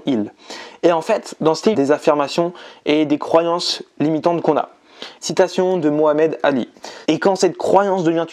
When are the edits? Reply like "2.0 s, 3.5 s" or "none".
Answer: 1.7 s, 5.2 s, 7.0 s